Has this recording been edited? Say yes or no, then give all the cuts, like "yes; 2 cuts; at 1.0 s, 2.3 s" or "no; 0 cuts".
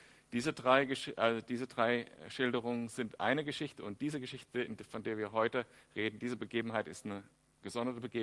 no; 0 cuts